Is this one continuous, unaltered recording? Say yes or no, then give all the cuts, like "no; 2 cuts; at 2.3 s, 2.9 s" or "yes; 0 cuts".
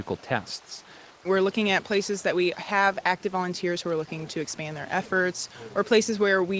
no; 1 cut; at 1.1 s